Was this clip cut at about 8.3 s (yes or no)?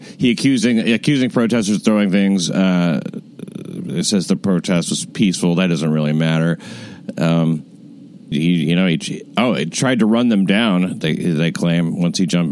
yes